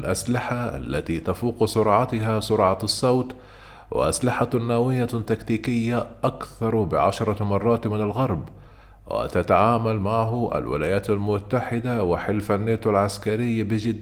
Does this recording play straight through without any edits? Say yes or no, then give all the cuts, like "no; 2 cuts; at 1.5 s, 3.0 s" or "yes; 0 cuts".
yes; 0 cuts